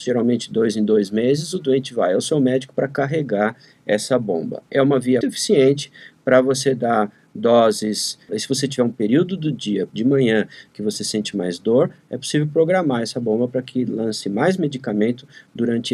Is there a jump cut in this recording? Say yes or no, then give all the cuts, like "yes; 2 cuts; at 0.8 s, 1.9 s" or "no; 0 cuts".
yes; 3 cuts; at 5.2 s, 8.3 s, 9.9 s